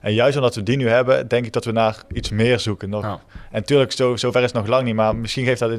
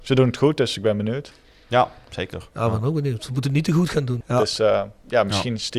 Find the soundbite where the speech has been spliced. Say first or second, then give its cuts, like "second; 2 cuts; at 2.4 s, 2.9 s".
second; 1 cut; at 4.2 s